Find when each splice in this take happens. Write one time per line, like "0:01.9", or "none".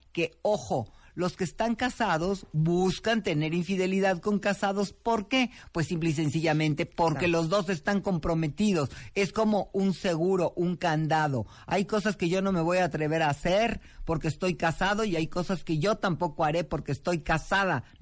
none